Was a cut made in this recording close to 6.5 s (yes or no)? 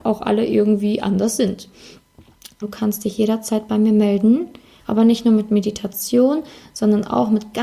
no